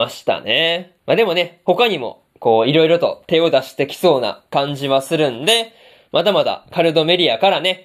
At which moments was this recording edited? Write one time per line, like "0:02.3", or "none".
0:01.0